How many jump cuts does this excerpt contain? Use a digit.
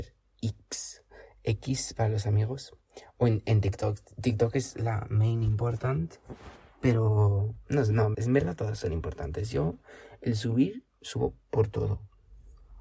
1